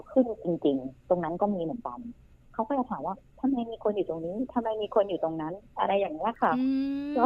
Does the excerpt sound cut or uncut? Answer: uncut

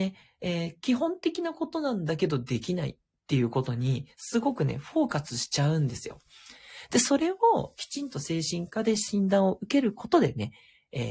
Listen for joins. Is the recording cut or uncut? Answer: uncut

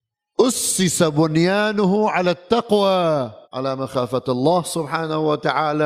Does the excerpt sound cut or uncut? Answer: cut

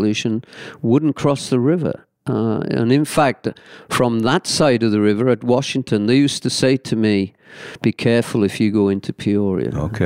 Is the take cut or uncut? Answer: uncut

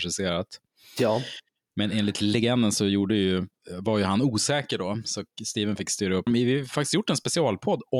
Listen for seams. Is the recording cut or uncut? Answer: cut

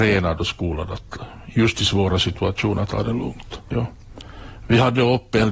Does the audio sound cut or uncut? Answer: cut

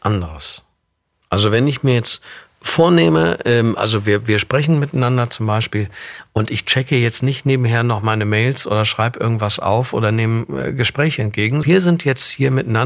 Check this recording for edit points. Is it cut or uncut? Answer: cut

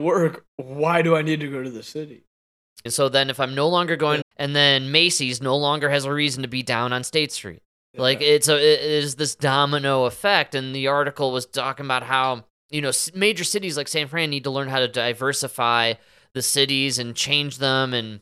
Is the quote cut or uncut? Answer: cut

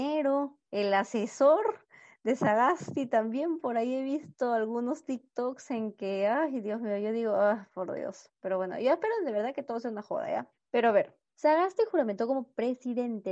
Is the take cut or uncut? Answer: uncut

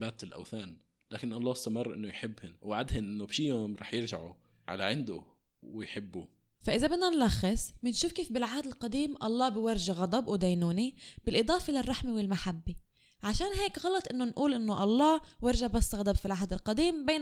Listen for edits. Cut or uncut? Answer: cut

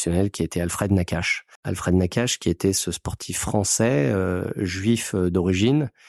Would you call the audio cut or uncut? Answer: cut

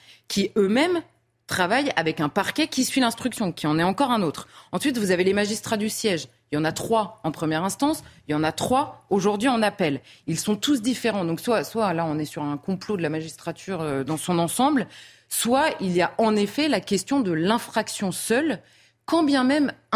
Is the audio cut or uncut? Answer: uncut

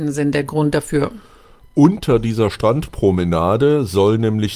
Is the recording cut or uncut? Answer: uncut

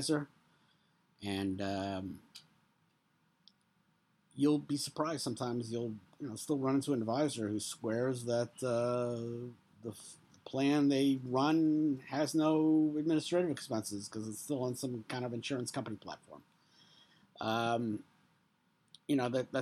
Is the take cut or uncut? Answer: uncut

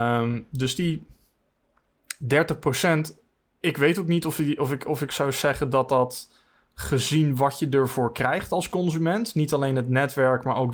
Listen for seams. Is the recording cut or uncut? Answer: uncut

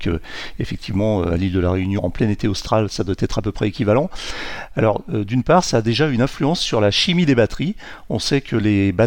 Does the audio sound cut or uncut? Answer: cut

